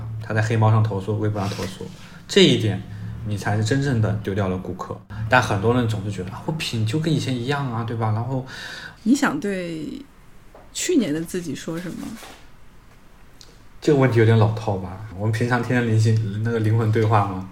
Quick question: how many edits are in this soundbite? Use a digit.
2